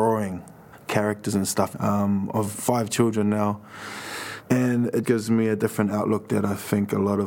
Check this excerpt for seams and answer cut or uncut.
cut